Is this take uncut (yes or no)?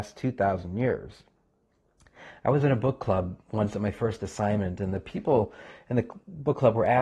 yes